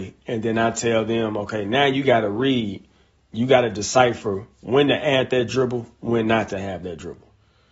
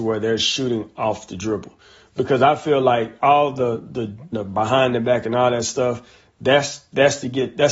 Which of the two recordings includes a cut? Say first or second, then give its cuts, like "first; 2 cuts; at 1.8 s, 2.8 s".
second; 1 cut; at 4.3 s